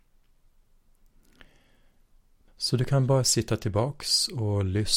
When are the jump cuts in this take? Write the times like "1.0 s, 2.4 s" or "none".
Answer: 2.5 s